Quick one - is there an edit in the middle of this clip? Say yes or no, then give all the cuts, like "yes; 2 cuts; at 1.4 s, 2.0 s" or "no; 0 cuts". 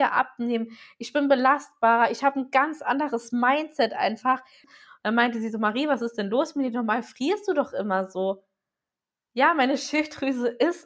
yes; 1 cut; at 4.6 s